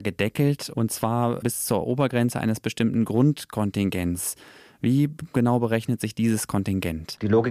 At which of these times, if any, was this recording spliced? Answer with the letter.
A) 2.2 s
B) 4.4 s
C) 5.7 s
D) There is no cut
D